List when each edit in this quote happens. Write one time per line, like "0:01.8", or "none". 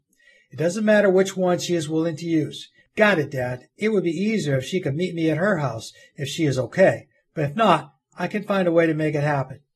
0:02.8